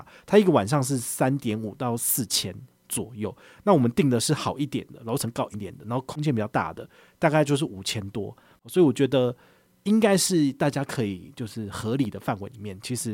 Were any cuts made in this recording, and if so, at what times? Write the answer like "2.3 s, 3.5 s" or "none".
5.5 s, 8.5 s